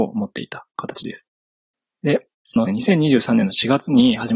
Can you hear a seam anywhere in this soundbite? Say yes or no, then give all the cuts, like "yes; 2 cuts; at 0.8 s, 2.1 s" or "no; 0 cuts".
yes; 1 cut; at 2.7 s